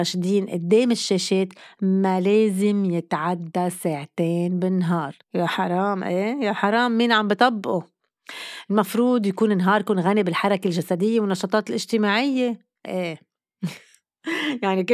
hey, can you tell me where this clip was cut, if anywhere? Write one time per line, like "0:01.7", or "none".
0:05.2
0:12.9